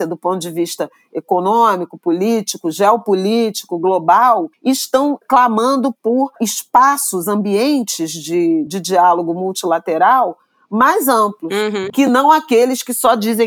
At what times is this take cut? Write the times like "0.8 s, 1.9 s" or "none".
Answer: 8.7 s, 11.9 s